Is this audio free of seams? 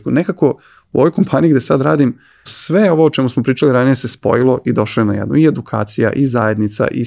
no; 1 cut; at 2.5 s

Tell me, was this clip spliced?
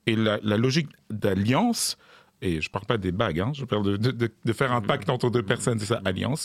no; 0 cuts

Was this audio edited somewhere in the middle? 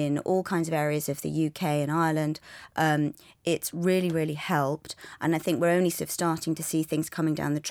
no; 0 cuts

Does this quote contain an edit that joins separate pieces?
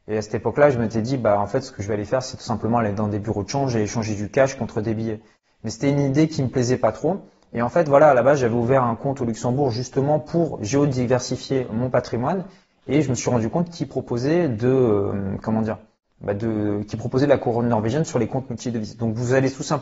no; 0 cuts

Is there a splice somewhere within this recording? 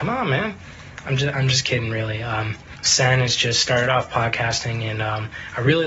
no; 0 cuts

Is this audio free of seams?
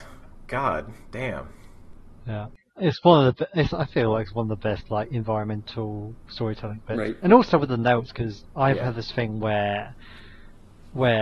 yes; 0 cuts

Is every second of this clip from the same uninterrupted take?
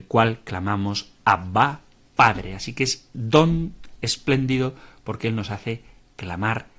yes; 0 cuts

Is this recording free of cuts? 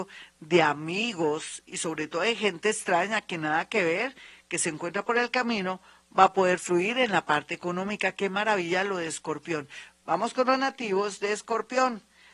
no; 1 cut; at 10.0 s

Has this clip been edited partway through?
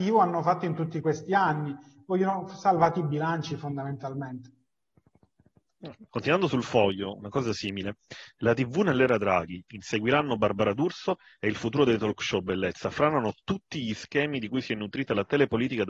yes; 2 cuts; at 6.1 s, 8.3 s

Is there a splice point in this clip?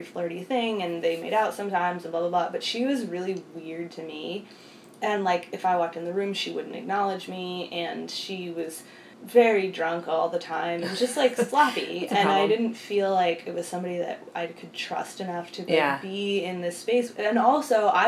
yes; 1 cut; at 9.1 s

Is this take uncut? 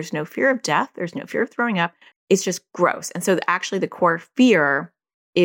no; 1 cut; at 2.1 s

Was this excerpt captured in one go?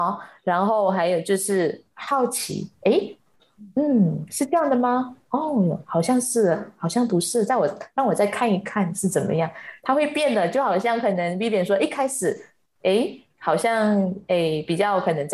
yes; 0 cuts

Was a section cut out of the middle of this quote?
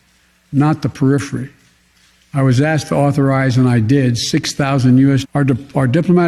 yes; 2 cuts; at 2.2 s, 5.2 s

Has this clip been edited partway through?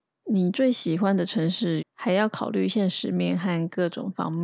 yes; 1 cut; at 1.8 s

